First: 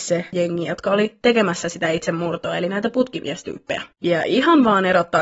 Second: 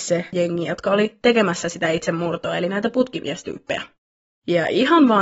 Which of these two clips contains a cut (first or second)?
first